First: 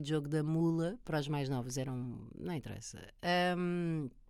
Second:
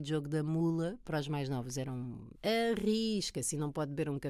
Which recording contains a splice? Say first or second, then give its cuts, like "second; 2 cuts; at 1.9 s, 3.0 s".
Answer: second; 1 cut; at 2.3 s